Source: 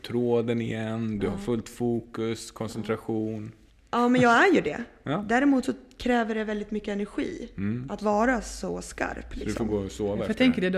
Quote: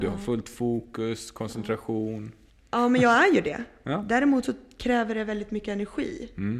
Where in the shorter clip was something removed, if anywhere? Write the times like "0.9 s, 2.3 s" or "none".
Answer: none